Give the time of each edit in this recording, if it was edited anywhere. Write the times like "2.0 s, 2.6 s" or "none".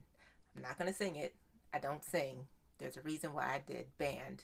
none